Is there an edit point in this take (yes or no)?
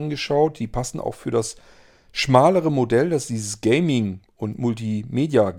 no